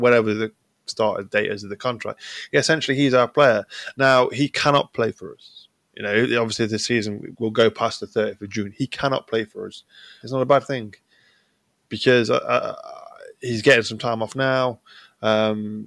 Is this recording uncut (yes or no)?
no